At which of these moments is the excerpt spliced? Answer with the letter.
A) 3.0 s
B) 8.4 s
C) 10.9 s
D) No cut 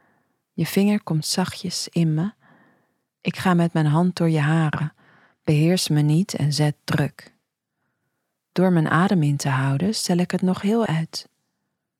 C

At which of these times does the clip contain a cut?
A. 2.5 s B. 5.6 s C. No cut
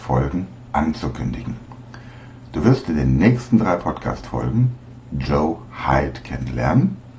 C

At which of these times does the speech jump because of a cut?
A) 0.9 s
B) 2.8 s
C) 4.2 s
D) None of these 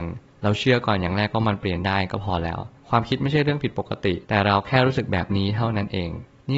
C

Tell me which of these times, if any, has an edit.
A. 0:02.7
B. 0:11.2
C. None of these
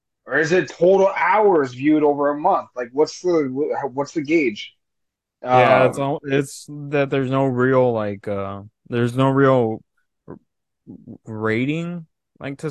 B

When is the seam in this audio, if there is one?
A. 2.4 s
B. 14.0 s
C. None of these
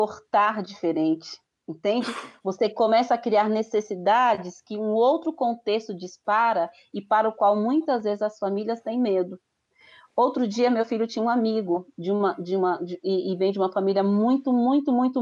C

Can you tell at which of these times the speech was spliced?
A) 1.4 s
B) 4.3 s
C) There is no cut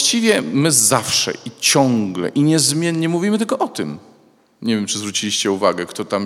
C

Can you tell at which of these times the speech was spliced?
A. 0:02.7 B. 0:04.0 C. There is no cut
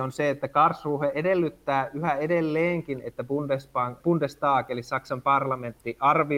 B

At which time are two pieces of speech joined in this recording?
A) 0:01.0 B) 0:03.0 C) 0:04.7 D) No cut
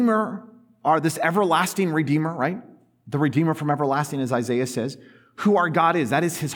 D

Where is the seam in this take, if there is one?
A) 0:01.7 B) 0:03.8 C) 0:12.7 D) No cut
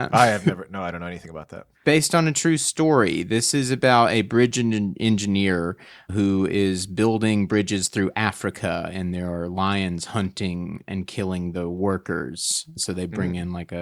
A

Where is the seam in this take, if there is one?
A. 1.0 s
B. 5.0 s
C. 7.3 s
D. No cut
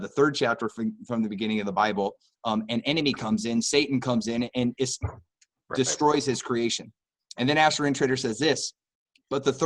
B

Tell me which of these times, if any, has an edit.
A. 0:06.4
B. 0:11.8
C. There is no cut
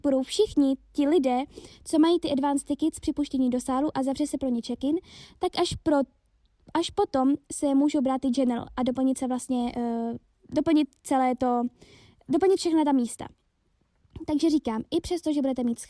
C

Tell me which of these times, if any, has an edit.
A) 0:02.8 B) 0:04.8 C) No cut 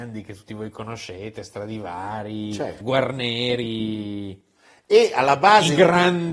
A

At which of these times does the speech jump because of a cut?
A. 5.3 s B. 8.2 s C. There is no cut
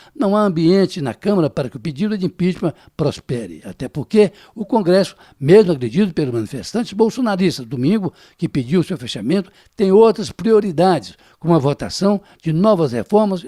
C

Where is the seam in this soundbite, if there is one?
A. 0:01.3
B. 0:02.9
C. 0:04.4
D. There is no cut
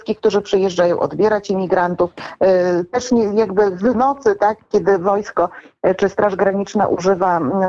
D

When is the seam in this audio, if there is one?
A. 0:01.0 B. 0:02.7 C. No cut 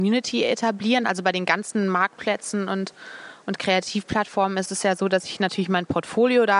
A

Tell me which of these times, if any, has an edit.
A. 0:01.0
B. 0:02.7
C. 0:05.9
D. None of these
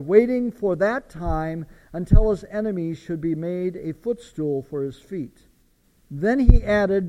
C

